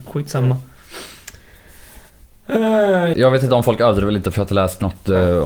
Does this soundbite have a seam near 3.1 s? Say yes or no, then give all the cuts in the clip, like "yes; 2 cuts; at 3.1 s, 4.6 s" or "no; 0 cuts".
yes; 1 cut; at 3.1 s